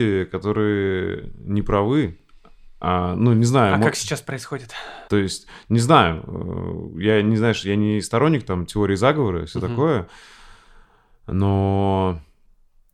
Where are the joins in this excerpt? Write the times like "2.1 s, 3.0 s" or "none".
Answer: 5.1 s